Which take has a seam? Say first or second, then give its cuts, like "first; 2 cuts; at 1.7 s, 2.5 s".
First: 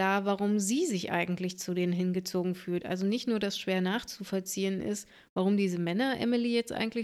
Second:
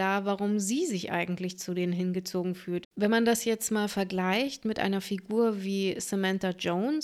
second; 1 cut; at 2.8 s